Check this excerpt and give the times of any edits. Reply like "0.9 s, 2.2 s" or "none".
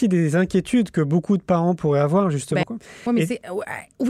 2.6 s